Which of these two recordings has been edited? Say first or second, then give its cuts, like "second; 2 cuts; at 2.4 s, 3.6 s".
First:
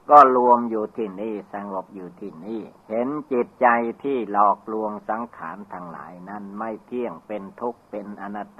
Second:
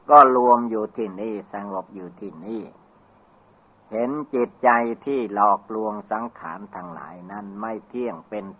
first; 1 cut; at 2.8 s